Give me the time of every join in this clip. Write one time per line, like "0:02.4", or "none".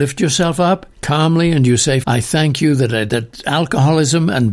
0:00.9
0:02.0
0:03.1